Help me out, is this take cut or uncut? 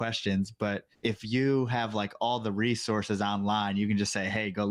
cut